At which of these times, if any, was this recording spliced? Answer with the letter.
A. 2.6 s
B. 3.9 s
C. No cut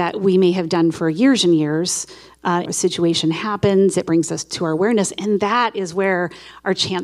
A